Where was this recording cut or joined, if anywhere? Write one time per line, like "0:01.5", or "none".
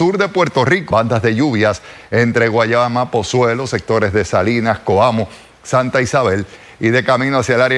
0:00.9